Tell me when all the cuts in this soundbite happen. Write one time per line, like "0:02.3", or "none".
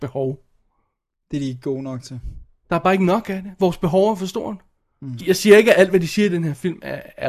0:05.2